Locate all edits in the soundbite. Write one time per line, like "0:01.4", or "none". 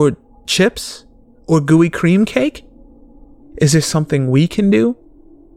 0:03.4